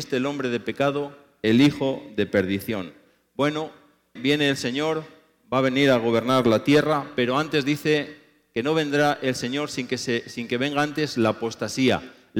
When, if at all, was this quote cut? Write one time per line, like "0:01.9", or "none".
0:04.2